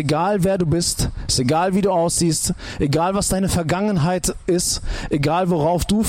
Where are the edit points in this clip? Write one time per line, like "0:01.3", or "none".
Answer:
none